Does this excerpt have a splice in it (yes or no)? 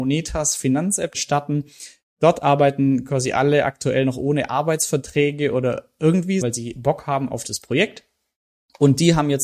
yes